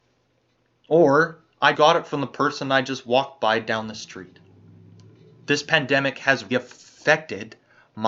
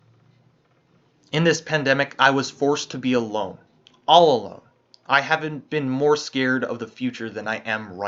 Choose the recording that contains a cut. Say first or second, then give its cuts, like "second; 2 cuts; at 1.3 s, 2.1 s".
first; 2 cuts; at 1.7 s, 6.5 s